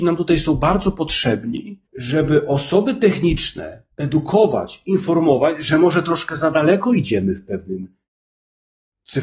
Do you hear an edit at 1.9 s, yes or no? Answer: yes